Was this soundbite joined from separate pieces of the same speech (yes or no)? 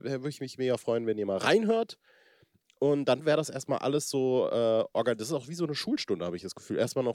no